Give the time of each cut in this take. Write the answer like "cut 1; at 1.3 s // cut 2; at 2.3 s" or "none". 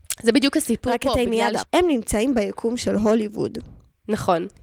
cut 1; at 1.6 s